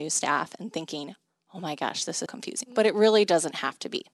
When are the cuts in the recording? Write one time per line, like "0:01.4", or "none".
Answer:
0:02.3